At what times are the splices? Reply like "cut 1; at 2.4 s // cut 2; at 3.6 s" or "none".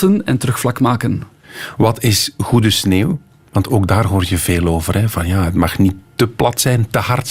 none